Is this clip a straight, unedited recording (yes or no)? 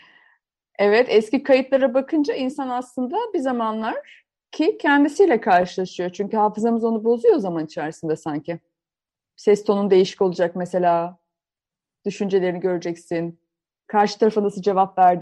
yes